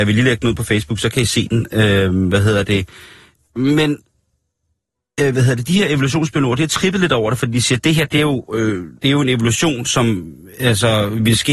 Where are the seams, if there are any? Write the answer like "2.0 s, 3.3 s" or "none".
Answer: 9.0 s

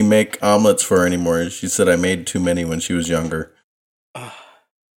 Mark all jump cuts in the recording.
none

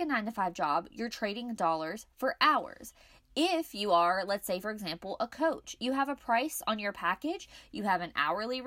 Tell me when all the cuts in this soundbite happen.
none

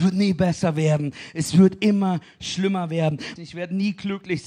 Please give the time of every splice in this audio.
3.4 s

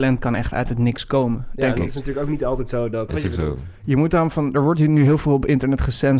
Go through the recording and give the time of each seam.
3.1 s

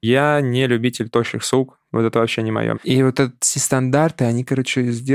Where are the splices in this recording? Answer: 2.7 s

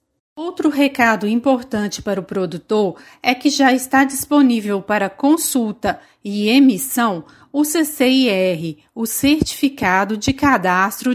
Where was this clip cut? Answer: none

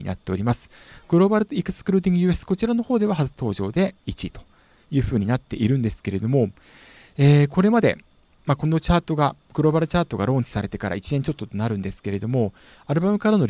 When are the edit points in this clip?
none

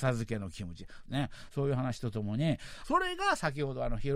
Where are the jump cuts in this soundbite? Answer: 1.0 s, 2.8 s

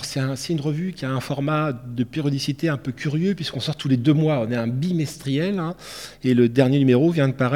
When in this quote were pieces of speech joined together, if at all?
none

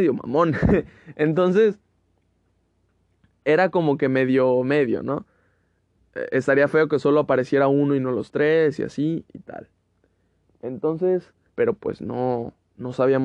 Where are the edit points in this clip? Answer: 11.5 s

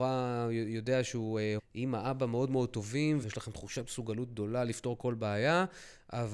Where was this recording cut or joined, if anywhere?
1.6 s, 3.2 s

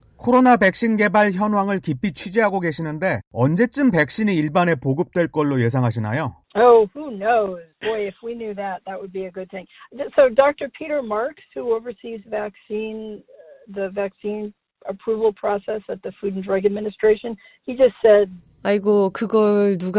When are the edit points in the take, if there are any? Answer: 6.4 s, 7.7 s

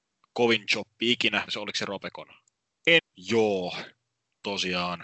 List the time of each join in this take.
1.5 s, 3.0 s

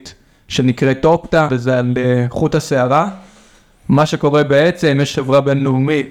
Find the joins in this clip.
1.5 s

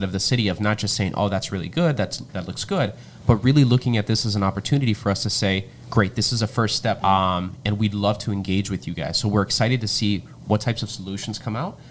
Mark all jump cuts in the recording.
7.0 s

